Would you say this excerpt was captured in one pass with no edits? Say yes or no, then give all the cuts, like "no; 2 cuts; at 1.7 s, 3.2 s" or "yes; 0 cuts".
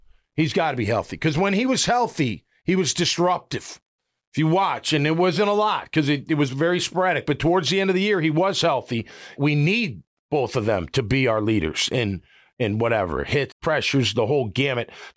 no; 2 cuts; at 9.4 s, 13.5 s